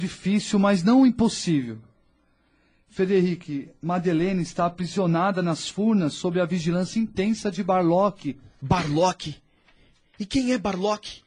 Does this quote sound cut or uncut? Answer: uncut